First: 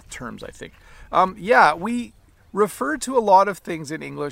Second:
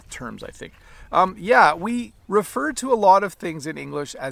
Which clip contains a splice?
second; 1 cut; at 2.2 s

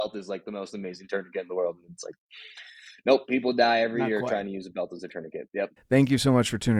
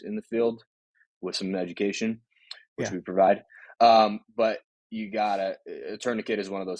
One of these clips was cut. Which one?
first; 1 cut; at 5.8 s

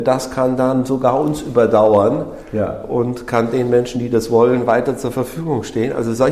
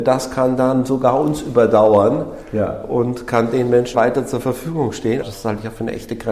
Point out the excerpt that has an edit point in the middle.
second; 2 cuts; at 3.9 s, 5.2 s

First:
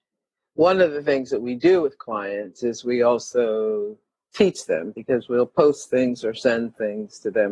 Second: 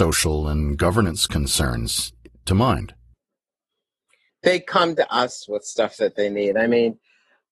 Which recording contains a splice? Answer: second; 1 cut; at 4.3 s

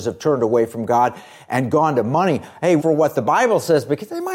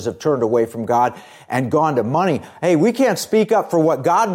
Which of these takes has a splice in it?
first; 1 cut; at 2.8 s

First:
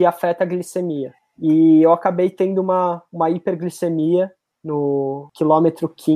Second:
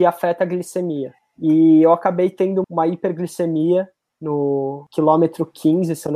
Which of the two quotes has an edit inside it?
second; 1 cut; at 2.6 s

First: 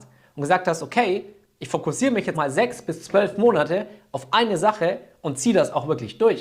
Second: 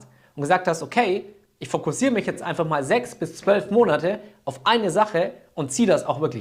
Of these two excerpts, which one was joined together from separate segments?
first; 1 cut; at 2.3 s

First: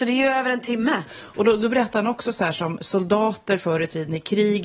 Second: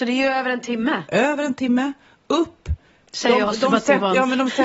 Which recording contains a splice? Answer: first; 1 cut; at 1.0 s

